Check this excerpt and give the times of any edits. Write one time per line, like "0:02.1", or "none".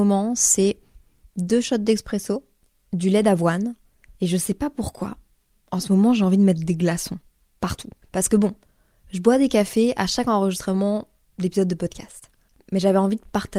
0:08.0